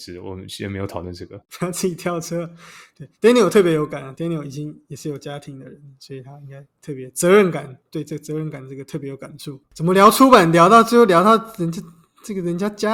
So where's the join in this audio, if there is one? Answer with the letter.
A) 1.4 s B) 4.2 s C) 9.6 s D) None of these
C